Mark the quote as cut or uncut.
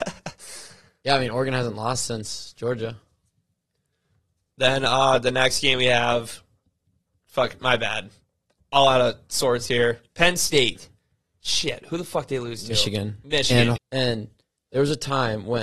cut